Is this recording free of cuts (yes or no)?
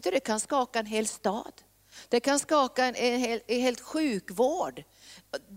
no